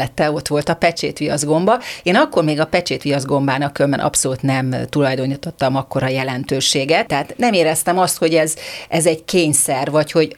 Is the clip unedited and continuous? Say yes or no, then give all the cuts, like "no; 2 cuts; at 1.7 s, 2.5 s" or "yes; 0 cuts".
no; 1 cut; at 7.1 s